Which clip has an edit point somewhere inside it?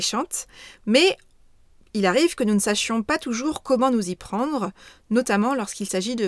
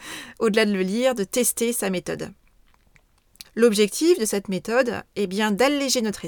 second; 1 cut; at 3.4 s

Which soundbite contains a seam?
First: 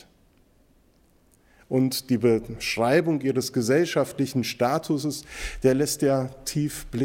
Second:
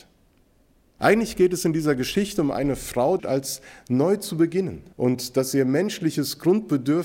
second; 3 cuts; at 1.0 s, 3.2 s, 4.9 s

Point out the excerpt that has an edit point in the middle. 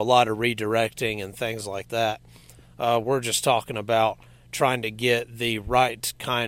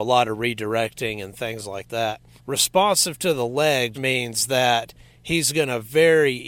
second; 2 cuts; at 2.4 s, 3.9 s

